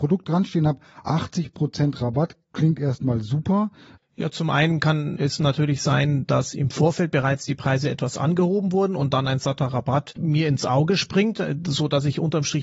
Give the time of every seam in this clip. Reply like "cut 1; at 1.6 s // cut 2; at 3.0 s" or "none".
cut 1; at 4.0 s // cut 2; at 5.2 s